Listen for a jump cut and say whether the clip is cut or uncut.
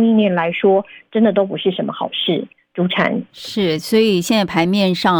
uncut